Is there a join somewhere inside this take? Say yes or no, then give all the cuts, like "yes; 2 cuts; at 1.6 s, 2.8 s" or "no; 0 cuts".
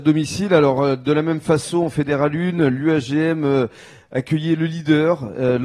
no; 0 cuts